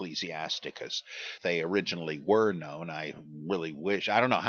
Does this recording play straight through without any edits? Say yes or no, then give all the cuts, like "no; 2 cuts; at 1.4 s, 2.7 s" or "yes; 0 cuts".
no; 1 cut; at 1.4 s